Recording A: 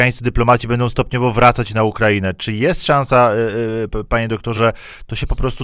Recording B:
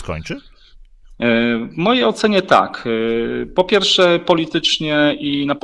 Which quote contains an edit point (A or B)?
A